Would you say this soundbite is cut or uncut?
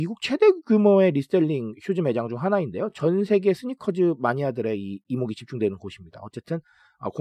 uncut